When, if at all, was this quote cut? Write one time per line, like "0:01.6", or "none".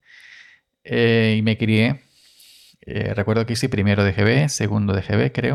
none